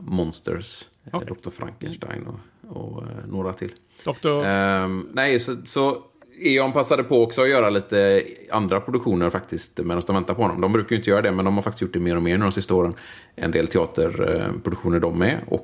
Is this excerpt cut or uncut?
cut